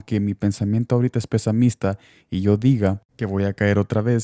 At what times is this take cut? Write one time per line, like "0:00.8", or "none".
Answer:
0:03.1